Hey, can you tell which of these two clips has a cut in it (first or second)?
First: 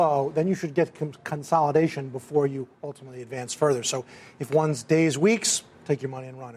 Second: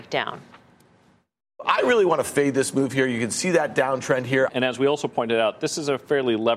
second